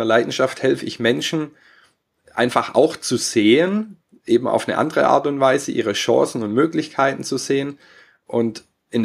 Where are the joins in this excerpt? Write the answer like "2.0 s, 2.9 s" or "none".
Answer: none